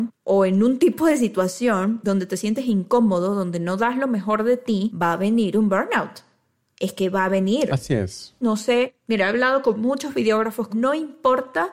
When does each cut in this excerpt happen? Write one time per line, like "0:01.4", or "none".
0:08.4
0:10.7